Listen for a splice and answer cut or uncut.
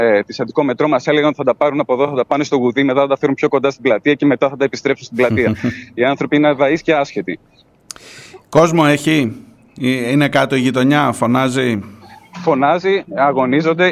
uncut